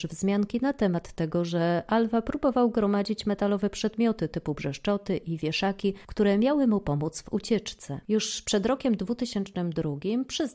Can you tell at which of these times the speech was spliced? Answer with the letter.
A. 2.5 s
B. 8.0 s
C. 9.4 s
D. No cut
B